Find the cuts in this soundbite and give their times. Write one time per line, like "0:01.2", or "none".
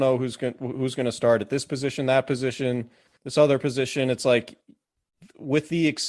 none